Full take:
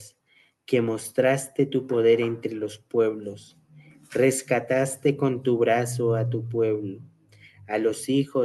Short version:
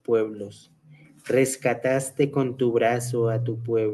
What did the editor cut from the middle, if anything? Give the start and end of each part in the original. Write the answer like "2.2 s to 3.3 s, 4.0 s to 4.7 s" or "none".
none